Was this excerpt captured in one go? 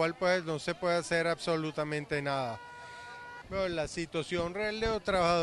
no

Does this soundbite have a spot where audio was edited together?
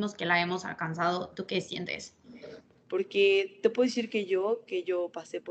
yes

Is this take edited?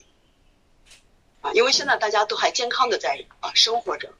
no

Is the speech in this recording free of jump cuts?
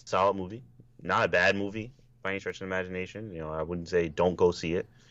yes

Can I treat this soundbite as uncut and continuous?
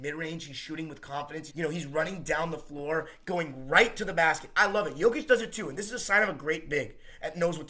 no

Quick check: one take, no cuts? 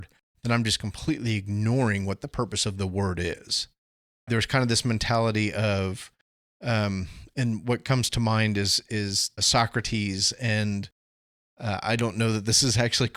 no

